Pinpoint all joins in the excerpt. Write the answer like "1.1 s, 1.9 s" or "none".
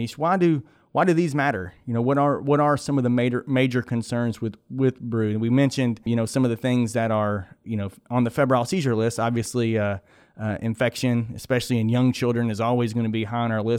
none